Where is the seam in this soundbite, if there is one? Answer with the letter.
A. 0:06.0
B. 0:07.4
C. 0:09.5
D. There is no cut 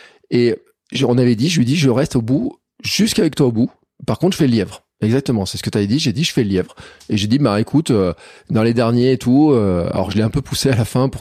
D